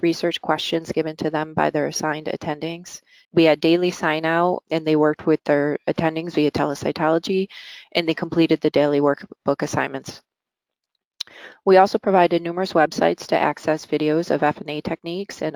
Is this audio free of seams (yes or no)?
no